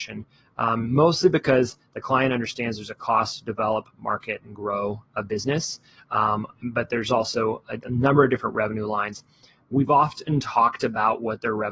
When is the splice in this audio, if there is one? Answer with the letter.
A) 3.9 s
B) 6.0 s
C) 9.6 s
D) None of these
D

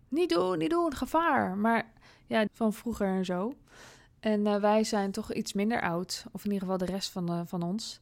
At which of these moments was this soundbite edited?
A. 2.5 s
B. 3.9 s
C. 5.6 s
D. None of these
A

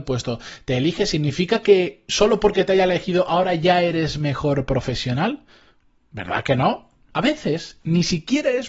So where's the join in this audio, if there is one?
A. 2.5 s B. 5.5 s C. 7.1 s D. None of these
C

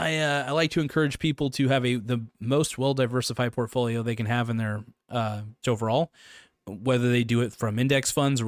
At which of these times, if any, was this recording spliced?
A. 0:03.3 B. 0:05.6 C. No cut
B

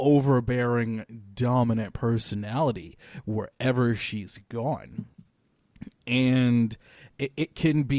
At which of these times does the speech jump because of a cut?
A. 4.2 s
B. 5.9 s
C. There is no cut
C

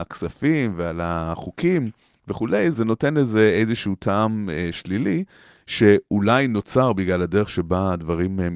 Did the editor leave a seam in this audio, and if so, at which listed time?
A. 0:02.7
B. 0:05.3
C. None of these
A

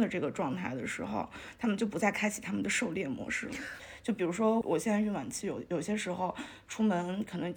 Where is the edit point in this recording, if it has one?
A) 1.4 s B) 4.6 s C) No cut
B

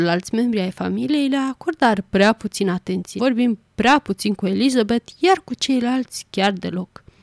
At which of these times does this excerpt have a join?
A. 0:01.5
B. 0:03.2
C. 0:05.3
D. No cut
B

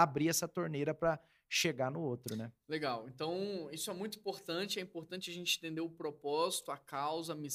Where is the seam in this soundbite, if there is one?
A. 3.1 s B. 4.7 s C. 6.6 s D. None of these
D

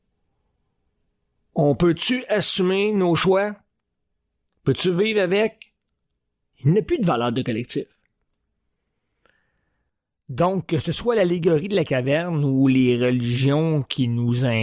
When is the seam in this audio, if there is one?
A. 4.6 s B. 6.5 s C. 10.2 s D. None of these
B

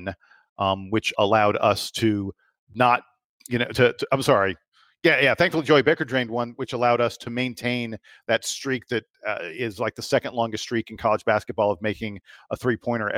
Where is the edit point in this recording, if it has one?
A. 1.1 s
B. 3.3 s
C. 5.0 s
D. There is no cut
A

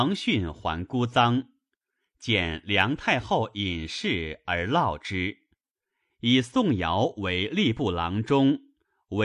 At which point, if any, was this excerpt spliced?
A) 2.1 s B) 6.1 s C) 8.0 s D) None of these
B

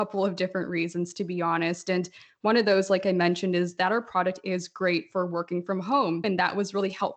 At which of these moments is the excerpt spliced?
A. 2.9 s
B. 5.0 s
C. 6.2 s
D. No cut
C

